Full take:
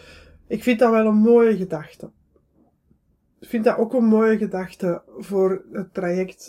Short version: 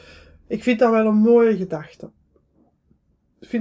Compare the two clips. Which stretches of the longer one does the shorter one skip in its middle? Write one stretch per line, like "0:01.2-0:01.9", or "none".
none